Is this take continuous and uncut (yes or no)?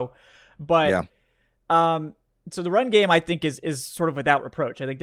yes